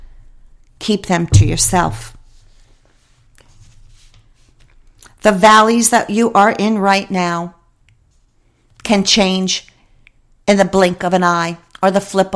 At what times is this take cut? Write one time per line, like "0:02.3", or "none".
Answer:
none